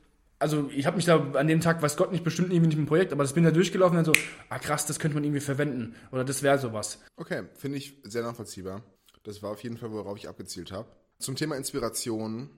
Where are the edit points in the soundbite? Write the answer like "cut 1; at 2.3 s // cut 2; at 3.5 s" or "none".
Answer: cut 1; at 7.1 s